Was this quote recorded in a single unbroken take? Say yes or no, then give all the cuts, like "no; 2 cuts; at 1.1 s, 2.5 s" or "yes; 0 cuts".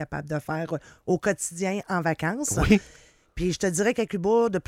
yes; 0 cuts